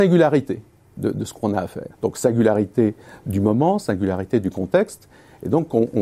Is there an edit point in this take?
yes; 1 cut; at 1.9 s

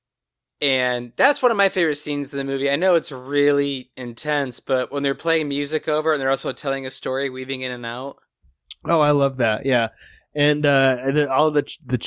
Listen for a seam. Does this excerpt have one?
no; 0 cuts

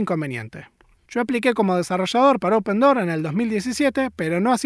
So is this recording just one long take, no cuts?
no; 1 cut; at 1.0 s

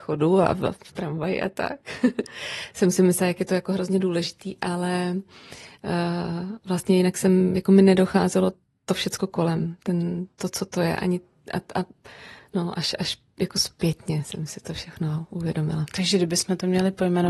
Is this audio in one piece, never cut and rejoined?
no; 1 cut; at 10.3 s

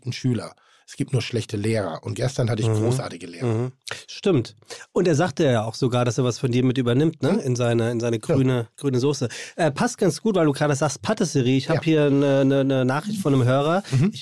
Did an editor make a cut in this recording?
no; 0 cuts

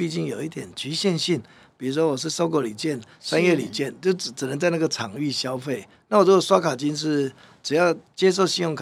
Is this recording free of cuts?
yes; 0 cuts

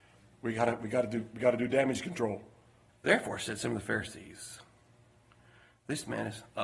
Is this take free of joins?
no; 1 cut; at 2.9 s

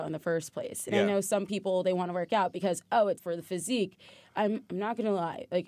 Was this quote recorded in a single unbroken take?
no; 1 cut; at 3.2 s

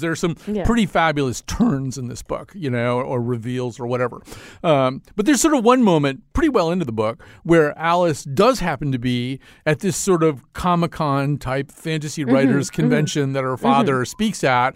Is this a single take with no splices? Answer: yes; 0 cuts

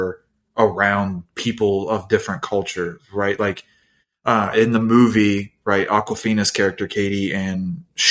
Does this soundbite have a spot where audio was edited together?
no; 0 cuts

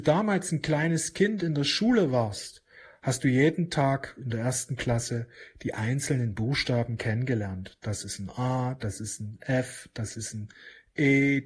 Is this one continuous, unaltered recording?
yes; 0 cuts

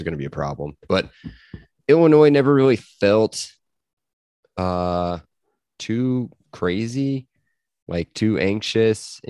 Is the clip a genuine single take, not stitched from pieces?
yes; 0 cuts

